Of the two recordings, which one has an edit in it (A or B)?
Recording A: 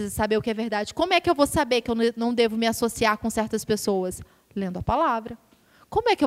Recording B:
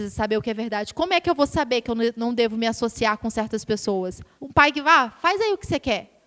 B